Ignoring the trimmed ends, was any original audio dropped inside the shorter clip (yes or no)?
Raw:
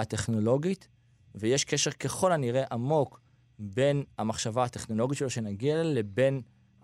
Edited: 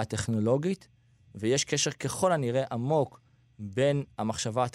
no